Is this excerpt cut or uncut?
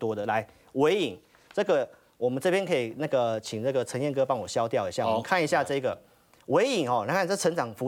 uncut